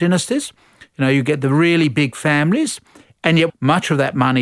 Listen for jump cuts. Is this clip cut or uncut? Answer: cut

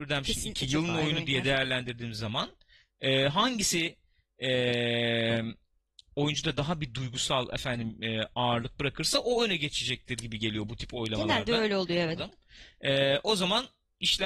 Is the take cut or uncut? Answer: cut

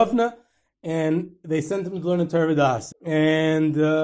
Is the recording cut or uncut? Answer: cut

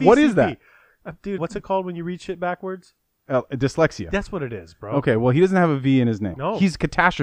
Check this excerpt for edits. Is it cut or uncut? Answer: cut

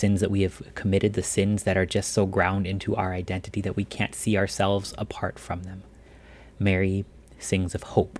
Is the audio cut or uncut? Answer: cut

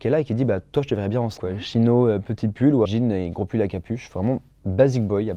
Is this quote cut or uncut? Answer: cut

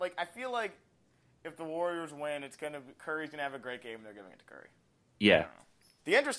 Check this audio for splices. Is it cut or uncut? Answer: uncut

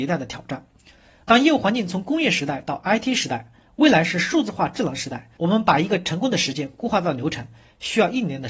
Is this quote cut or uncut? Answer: cut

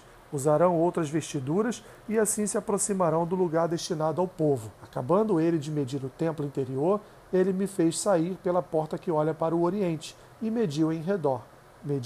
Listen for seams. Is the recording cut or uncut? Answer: cut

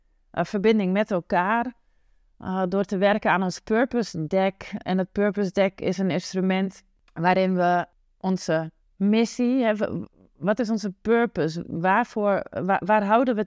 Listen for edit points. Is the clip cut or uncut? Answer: uncut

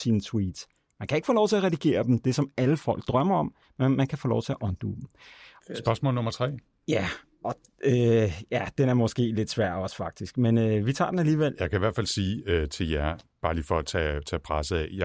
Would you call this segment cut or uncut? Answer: cut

